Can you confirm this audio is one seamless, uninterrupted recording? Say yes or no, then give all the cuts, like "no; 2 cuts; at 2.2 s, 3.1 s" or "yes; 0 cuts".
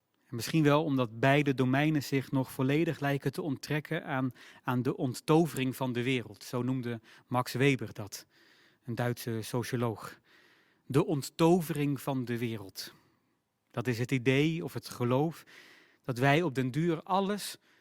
yes; 0 cuts